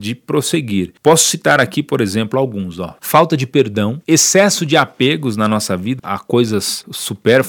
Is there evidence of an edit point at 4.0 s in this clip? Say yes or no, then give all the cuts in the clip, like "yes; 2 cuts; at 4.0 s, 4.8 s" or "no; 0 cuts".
yes; 3 cuts; at 3.0 s, 4.0 s, 6.0 s